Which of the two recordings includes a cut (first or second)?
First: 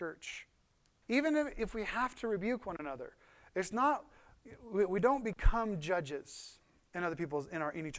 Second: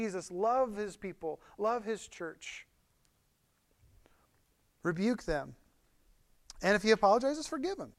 first